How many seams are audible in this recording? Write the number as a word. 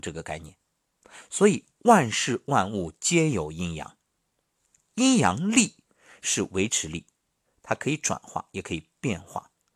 zero